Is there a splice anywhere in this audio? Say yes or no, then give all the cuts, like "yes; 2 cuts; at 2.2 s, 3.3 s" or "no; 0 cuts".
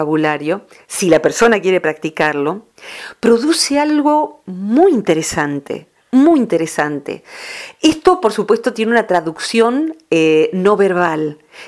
no; 0 cuts